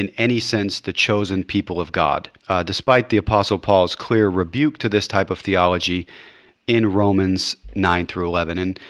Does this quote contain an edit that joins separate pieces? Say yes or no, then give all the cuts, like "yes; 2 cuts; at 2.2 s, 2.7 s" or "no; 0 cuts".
yes; 1 cut; at 2.4 s